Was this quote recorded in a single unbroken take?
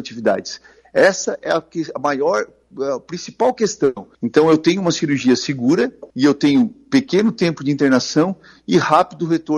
no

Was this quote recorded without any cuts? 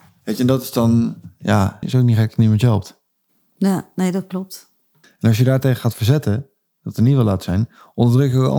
no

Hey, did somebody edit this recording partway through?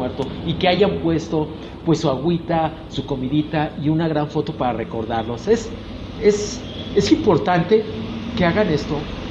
no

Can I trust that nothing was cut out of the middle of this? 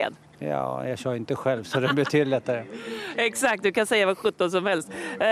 yes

